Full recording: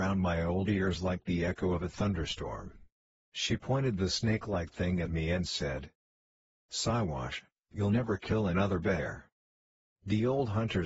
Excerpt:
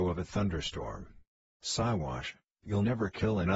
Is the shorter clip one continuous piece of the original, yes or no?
no